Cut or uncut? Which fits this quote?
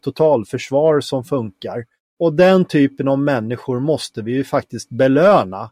cut